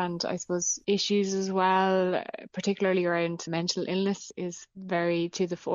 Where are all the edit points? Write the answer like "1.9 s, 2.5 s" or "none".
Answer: none